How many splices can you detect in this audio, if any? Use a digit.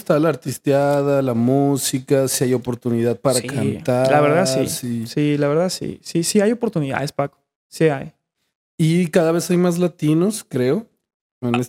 0